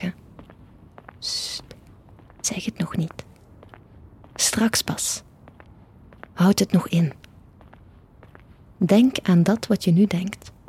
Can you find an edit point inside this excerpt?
yes; 1 cut; at 6.9 s

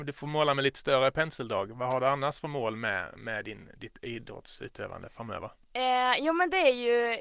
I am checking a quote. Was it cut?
no; 0 cuts

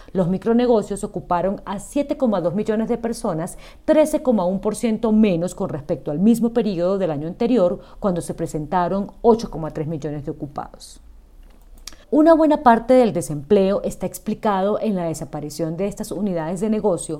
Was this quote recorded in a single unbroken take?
no; 1 cut; at 12.0 s

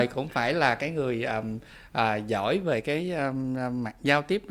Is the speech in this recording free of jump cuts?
yes; 0 cuts

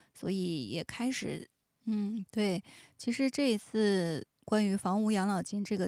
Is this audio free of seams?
no; 2 cuts; at 1.7 s, 4.3 s

